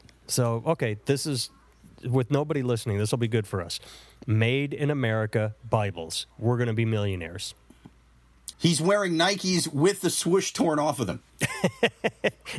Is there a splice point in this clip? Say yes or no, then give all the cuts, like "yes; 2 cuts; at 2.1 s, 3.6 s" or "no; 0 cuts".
yes; 1 cut; at 8.5 s